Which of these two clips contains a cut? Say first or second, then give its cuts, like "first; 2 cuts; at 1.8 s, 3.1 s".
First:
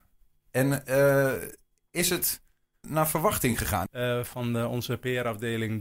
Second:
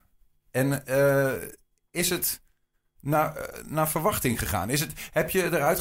first; 2 cuts; at 2.8 s, 3.9 s